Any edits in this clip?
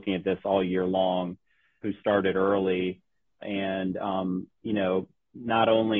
yes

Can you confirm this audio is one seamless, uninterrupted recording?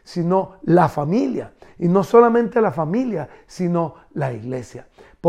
yes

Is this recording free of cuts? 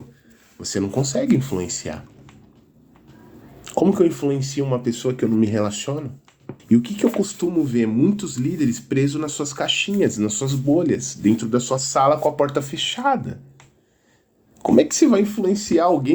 no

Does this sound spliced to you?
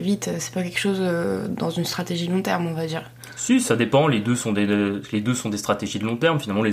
no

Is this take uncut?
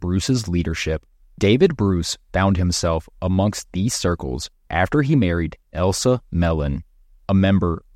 no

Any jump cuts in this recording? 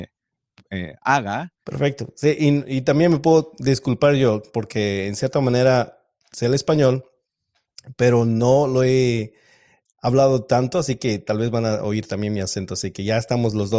yes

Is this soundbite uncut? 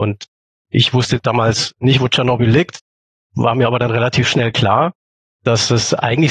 yes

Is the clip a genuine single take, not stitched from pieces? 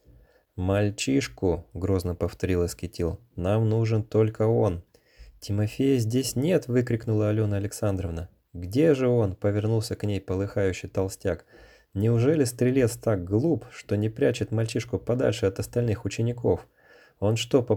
yes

